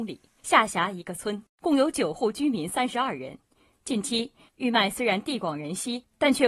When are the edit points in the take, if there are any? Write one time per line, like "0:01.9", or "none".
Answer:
0:04.5